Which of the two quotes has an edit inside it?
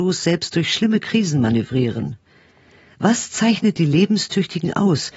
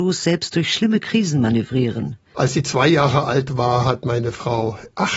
second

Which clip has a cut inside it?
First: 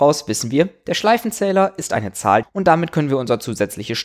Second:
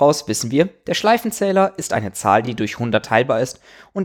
first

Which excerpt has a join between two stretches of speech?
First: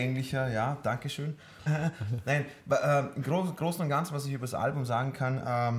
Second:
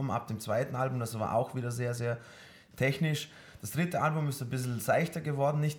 first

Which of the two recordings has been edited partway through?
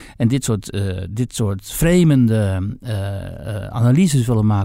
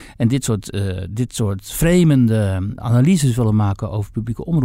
second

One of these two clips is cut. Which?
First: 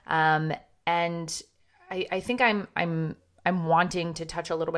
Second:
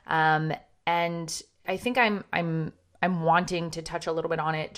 second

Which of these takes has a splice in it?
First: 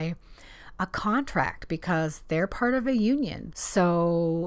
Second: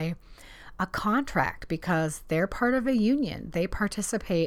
first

